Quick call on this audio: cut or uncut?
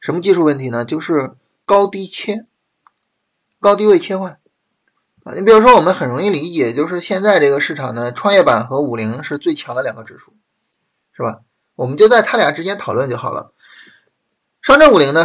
uncut